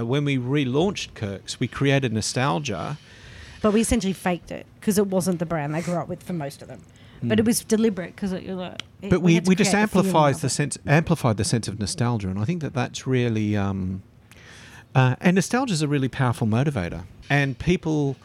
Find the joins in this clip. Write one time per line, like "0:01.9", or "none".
0:03.6
0:17.2